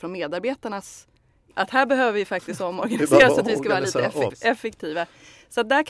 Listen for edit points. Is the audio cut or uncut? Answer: cut